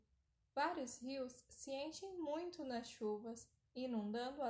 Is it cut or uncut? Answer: uncut